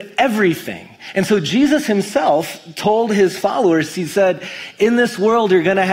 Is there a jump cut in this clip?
no; 0 cuts

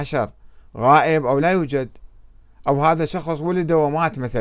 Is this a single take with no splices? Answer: no; 1 cut; at 1.4 s

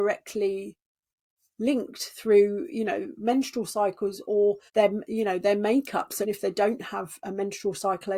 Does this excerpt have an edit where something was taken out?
yes; 2 cuts; at 4.7 s, 6.2 s

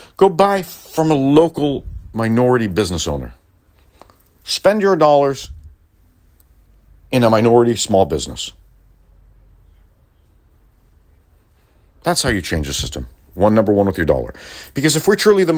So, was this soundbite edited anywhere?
no; 0 cuts

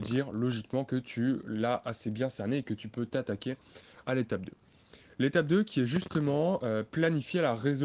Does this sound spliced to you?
no; 0 cuts

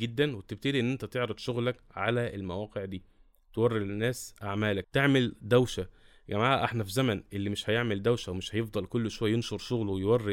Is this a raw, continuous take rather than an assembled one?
yes; 0 cuts

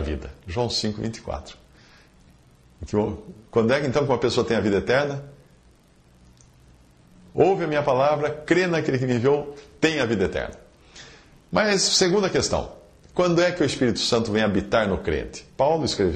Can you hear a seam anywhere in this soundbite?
no; 0 cuts

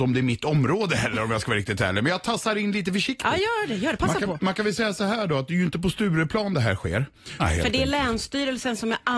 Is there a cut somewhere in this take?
yes; 1 cut; at 7.4 s

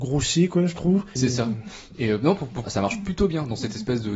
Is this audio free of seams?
no; 2 cuts; at 1.2 s, 2.6 s

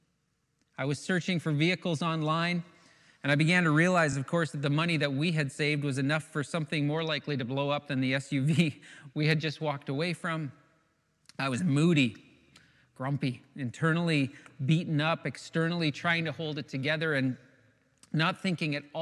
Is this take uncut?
yes; 0 cuts

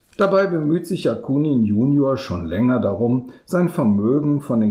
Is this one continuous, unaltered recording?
yes; 0 cuts

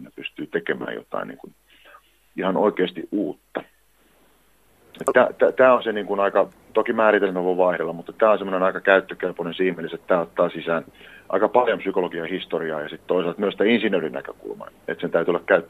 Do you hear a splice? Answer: yes; 1 cut; at 14.7 s

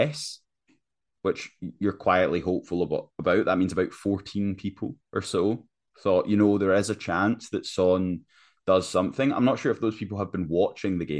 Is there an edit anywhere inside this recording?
no; 0 cuts

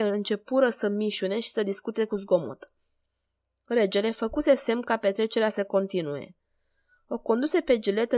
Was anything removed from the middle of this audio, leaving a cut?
no; 0 cuts

